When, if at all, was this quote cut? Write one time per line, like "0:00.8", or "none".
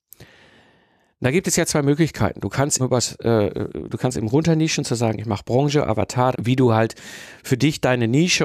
0:02.8
0:06.3